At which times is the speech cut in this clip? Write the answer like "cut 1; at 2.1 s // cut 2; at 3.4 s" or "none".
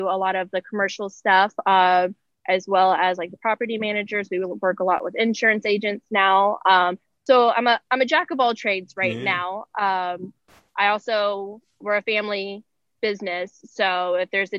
cut 1; at 11.8 s